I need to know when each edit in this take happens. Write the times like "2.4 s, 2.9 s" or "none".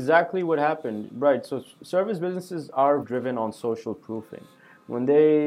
3.0 s